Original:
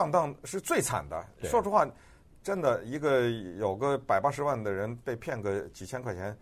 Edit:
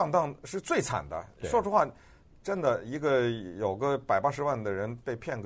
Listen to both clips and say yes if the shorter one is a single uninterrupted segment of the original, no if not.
yes